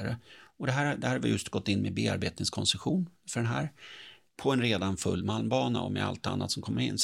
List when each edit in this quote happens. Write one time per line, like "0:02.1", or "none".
0:04.3